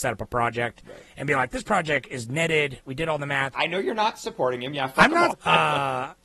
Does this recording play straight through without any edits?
no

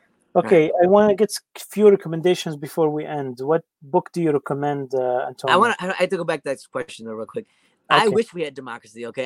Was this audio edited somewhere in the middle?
no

